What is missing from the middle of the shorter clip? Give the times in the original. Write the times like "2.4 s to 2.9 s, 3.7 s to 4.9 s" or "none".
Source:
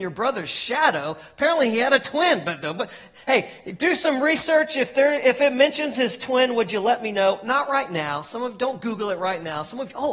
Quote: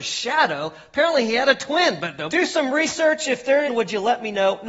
2.7 s to 3.8 s, 5.2 s to 6.5 s